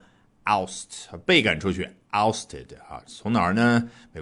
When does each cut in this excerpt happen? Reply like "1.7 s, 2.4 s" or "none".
none